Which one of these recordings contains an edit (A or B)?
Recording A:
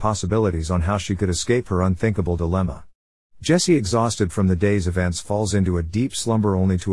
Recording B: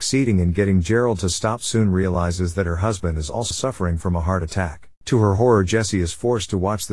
B